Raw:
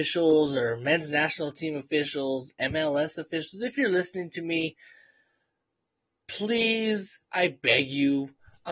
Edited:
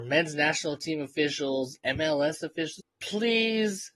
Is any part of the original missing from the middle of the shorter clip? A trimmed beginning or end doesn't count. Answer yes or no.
yes